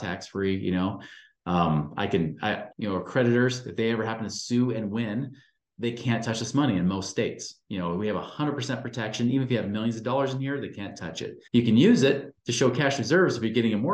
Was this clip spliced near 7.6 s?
no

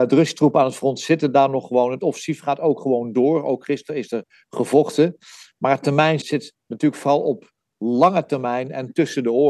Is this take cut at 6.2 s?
yes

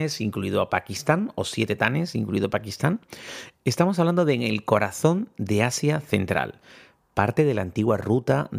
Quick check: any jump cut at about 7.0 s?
no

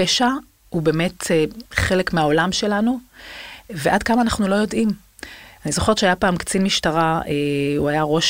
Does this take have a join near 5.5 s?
yes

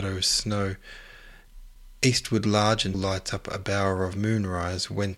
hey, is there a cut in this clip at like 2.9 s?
yes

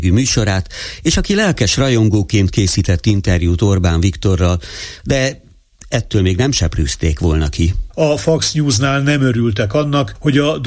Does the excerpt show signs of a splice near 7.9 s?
yes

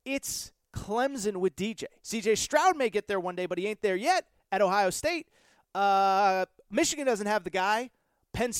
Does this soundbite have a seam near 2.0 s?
yes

